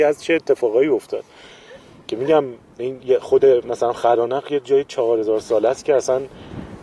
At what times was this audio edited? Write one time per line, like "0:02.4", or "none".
none